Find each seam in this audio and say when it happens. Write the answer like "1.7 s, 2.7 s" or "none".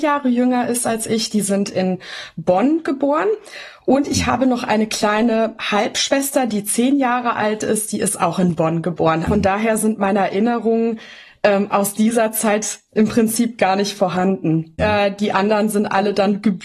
9.3 s, 14.8 s